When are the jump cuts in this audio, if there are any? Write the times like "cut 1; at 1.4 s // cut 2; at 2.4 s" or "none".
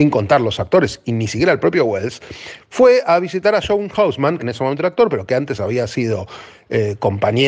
cut 1; at 4.4 s